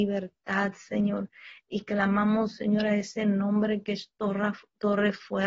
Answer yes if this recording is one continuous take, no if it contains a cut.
yes